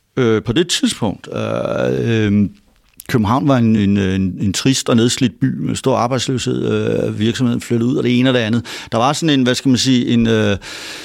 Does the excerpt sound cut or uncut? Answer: uncut